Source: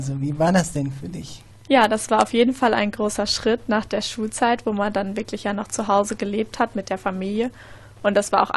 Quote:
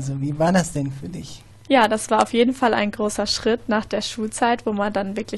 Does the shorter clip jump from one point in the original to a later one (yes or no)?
no